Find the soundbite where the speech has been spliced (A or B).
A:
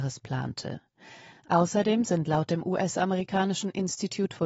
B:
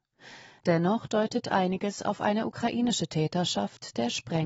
A